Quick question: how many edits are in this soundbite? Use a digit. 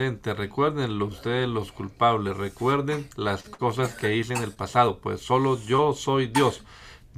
0